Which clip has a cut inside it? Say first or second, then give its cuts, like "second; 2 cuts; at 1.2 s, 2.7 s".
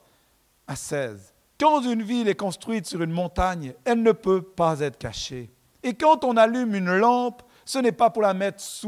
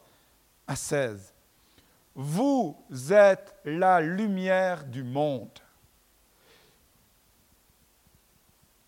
first; 1 cut; at 1.5 s